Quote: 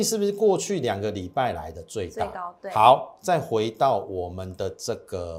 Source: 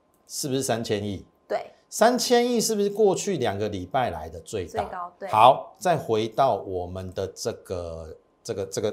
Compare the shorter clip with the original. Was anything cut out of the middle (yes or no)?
no